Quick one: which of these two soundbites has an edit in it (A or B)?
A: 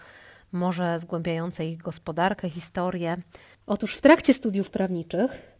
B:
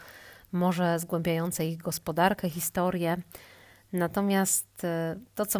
A